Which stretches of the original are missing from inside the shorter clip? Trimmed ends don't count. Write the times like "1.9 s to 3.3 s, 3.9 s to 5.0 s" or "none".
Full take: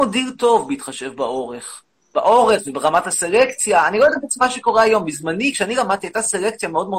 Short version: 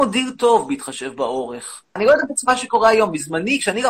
2.0 s to 3.9 s